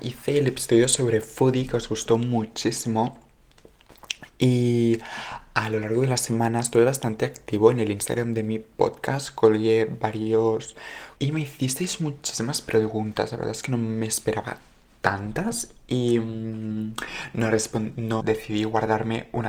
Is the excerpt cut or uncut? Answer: cut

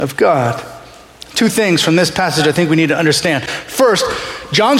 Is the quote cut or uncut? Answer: uncut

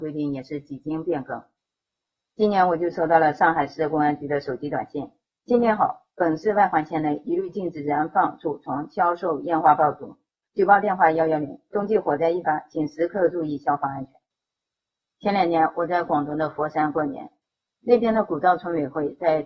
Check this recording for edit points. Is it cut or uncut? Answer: uncut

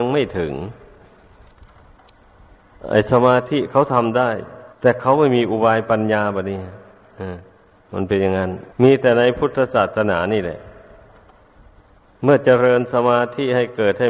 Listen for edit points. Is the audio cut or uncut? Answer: cut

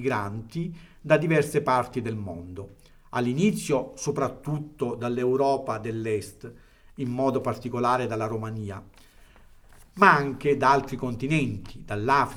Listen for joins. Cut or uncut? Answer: uncut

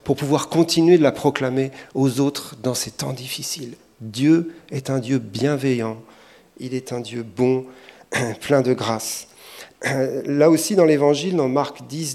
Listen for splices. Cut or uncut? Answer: uncut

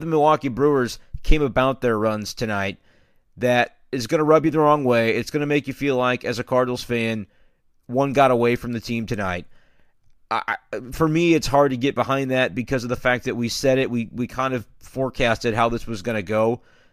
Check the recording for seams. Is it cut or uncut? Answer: uncut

